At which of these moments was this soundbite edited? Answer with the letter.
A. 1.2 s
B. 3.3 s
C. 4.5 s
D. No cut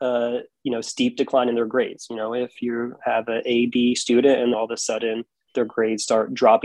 C